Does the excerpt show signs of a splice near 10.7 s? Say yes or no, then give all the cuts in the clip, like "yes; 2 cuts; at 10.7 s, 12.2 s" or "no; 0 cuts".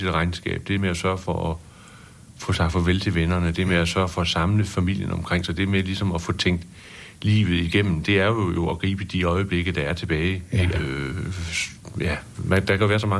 yes; 2 cuts; at 10.7 s, 11.9 s